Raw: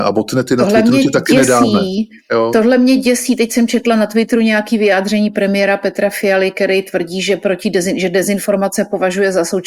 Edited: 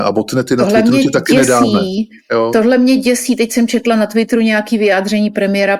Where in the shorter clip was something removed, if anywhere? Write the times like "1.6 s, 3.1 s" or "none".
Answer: none